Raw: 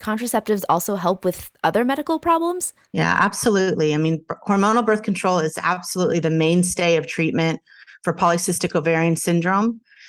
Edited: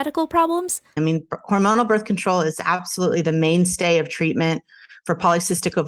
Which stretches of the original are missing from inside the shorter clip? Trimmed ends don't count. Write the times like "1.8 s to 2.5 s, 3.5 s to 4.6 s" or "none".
2.9 s to 3.9 s

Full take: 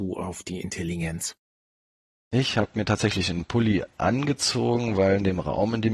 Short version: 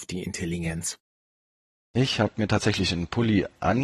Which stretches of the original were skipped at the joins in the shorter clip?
none

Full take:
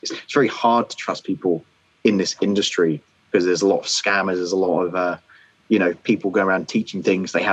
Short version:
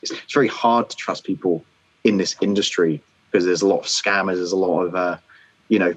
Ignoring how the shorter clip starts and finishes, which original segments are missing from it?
none

